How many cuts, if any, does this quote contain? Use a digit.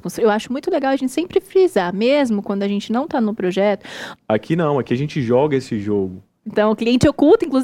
2